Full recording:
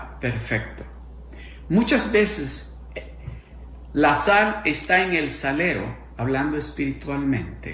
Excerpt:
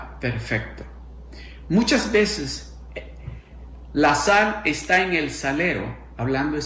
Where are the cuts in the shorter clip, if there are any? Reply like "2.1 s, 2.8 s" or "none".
none